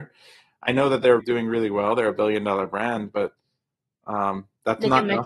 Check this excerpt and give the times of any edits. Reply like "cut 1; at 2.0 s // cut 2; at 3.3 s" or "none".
cut 1; at 1.2 s